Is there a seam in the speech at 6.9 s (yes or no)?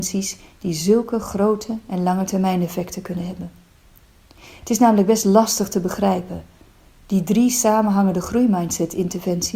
yes